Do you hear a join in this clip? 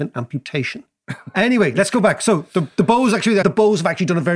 yes; 2 cuts; at 1.0 s, 3.4 s

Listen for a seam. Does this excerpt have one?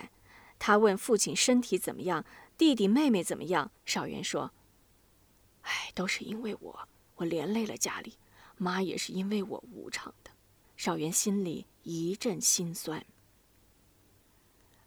yes; 2 cuts; at 3.8 s, 10.6 s

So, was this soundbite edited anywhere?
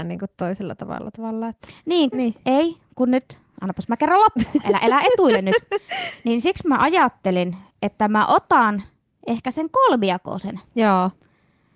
yes; 1 cut; at 2.1 s

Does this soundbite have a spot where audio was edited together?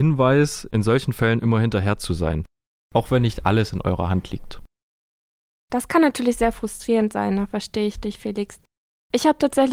no; 0 cuts

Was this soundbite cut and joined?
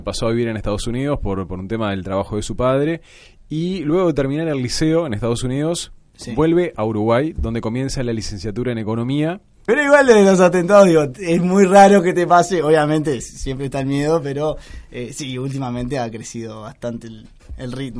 yes; 1 cut; at 9.7 s

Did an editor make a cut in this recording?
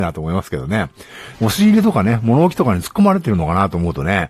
yes; 1 cut; at 1.3 s

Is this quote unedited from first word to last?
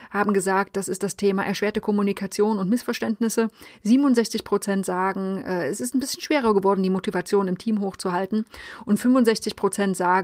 yes; 0 cuts

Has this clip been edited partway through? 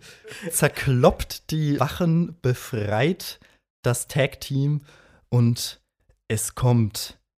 yes; 1 cut; at 1.8 s

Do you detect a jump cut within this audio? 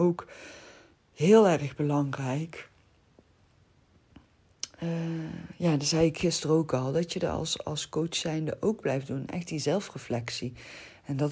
no; 0 cuts

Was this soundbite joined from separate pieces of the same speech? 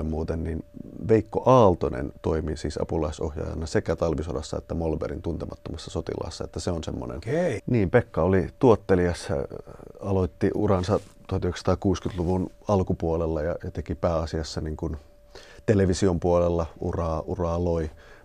yes; 1 cut; at 7.6 s

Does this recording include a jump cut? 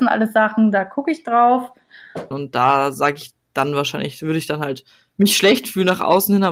yes; 1 cut; at 2.3 s

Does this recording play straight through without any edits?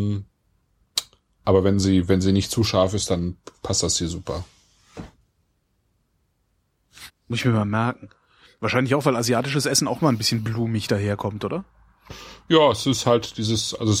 no; 1 cut; at 7.1 s

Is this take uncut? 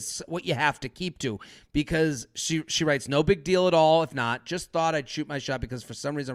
yes; 0 cuts

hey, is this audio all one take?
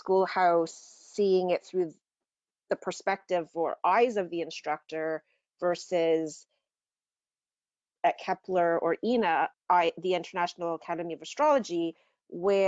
no; 1 cut; at 9.5 s

